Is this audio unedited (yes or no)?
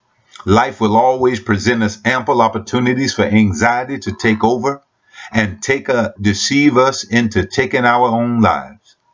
no